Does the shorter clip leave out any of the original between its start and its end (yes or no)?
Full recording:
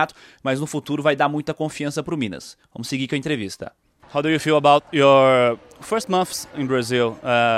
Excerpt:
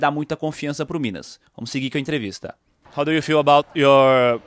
no